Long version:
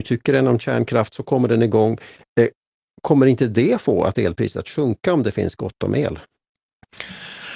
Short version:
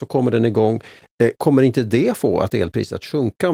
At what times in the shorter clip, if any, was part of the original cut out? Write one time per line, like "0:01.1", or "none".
0:01.4